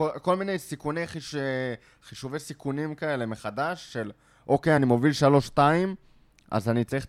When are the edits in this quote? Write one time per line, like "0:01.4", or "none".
none